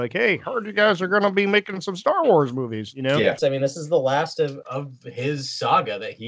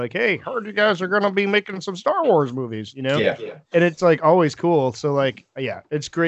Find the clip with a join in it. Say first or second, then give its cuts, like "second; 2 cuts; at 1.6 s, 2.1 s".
first; 2 cuts; at 3.4 s, 4.6 s